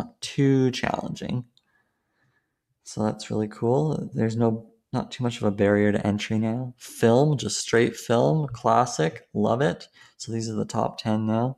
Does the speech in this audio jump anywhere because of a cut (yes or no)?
no